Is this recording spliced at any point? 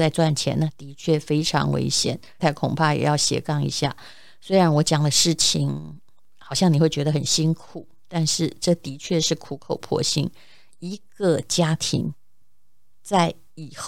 yes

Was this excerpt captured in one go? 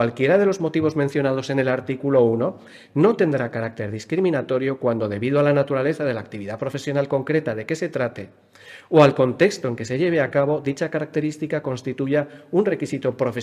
yes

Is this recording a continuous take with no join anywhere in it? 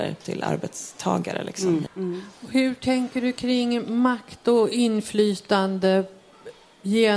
no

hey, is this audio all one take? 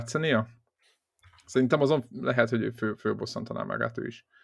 yes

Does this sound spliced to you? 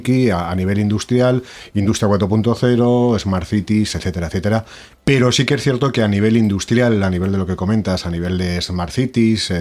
yes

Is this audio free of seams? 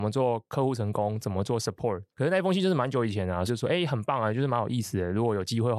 no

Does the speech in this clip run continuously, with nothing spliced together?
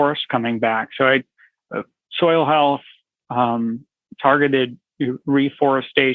yes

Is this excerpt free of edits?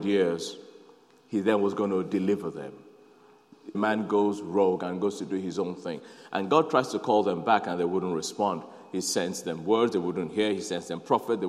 no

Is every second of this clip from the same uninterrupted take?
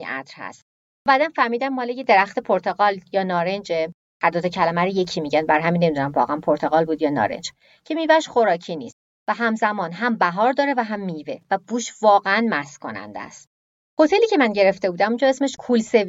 yes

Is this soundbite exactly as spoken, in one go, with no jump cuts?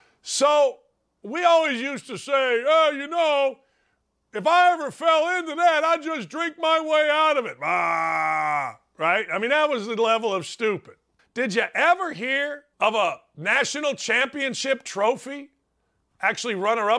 no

